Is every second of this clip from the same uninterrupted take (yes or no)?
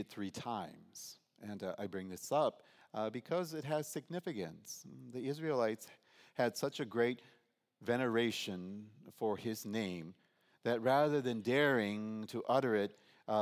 yes